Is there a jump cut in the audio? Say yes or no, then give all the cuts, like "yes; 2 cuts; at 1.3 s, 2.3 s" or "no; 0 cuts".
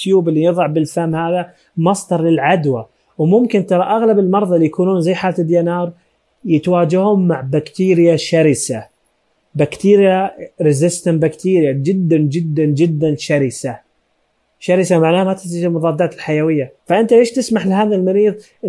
yes; 1 cut; at 16.8 s